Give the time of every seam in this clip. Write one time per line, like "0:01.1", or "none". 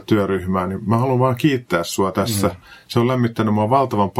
none